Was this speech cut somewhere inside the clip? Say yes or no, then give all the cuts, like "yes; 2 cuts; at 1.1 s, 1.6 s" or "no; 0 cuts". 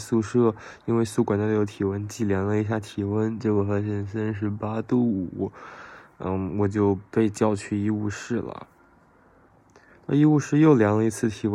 no; 0 cuts